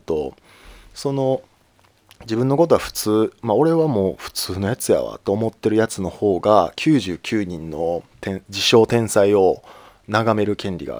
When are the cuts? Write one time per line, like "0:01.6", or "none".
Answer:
0:08.5